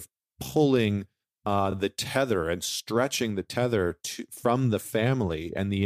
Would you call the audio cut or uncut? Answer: uncut